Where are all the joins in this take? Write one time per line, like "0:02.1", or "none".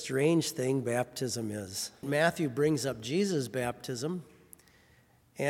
0:02.0